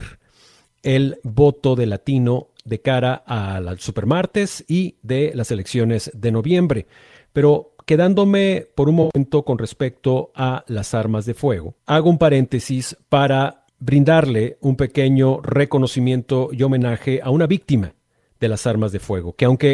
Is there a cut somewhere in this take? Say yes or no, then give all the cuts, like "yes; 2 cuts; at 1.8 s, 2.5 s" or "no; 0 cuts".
yes; 2 cuts; at 11.8 s, 13.7 s